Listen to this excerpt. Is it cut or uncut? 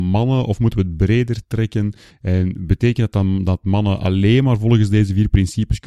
uncut